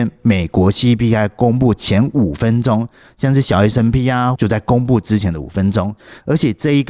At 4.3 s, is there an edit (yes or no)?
yes